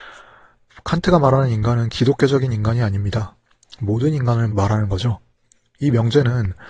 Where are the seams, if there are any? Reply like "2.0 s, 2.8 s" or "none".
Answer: 4.5 s